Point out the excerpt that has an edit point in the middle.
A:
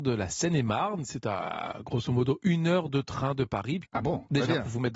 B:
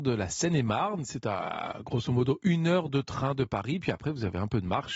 A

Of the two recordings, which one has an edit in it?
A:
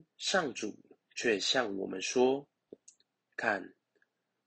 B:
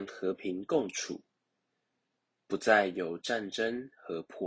A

